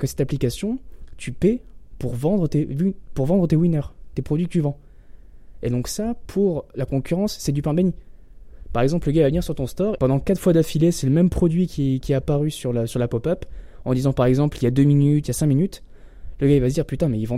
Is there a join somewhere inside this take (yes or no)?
yes